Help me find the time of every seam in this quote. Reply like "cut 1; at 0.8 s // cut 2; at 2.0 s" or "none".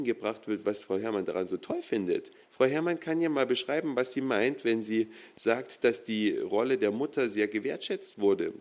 cut 1; at 2.4 s